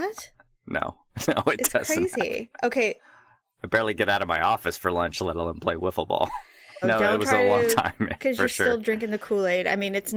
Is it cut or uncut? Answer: cut